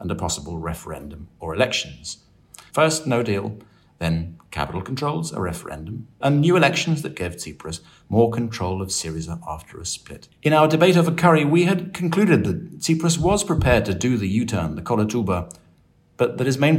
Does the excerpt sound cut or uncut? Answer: cut